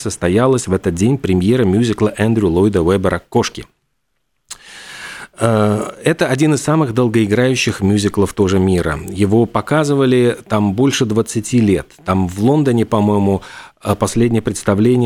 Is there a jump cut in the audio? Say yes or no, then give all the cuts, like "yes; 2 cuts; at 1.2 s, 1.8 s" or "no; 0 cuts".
no; 0 cuts